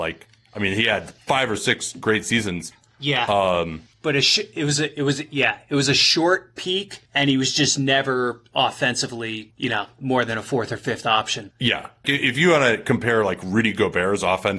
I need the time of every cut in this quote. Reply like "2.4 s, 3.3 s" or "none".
3.9 s, 12.0 s